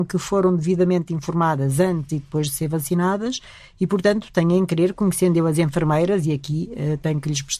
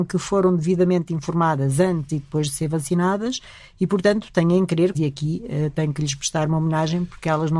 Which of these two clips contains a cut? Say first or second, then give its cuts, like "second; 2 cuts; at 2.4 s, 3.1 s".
second; 1 cut; at 4.9 s